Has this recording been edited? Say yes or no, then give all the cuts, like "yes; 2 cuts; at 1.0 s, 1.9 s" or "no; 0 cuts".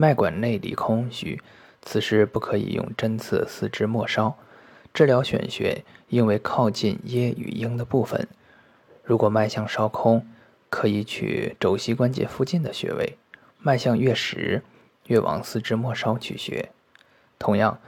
no; 0 cuts